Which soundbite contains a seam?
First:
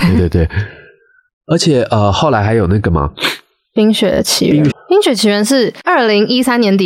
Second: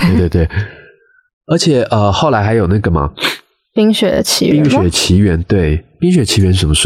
first; 1 cut; at 4.7 s

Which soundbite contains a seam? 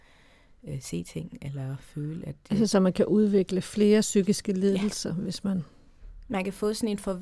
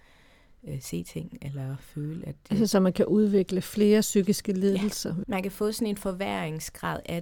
second; 1 cut; at 5.2 s

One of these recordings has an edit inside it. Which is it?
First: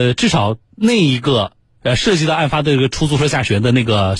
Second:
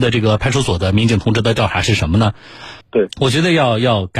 second; 1 cut; at 2.8 s

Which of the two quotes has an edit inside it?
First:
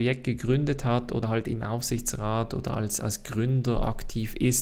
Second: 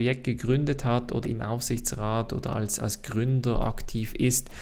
second; 1 cut; at 1.2 s

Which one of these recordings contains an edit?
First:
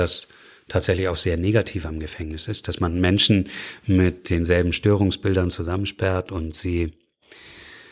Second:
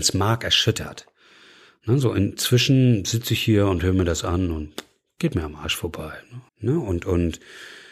second; 1 cut; at 6.5 s

